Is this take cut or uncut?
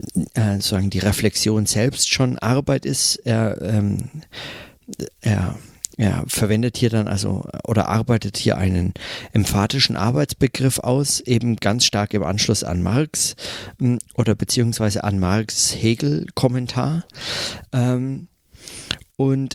uncut